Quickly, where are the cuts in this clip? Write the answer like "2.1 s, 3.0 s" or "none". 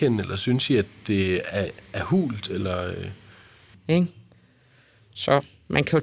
3.7 s